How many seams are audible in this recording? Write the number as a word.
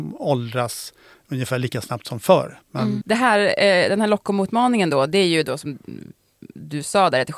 one